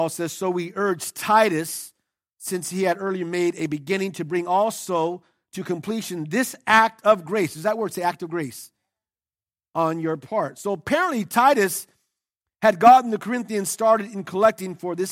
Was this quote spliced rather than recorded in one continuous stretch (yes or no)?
no